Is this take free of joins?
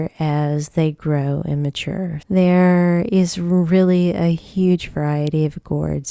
no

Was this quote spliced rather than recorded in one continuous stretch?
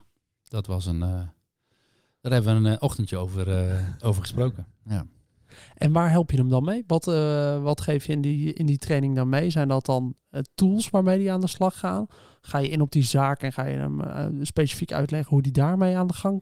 no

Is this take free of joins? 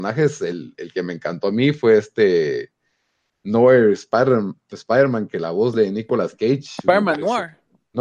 yes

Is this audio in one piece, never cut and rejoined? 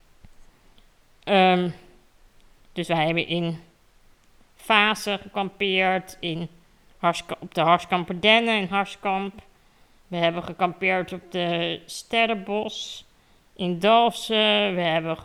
yes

